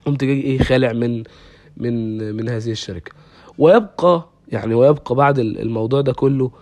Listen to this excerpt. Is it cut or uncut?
uncut